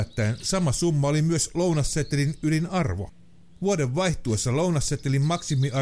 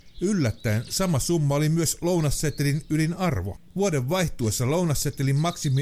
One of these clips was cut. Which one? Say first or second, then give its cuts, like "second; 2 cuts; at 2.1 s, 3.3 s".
second; 1 cut; at 3.7 s